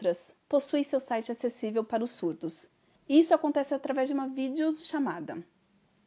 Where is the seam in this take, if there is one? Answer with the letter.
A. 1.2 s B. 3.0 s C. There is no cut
B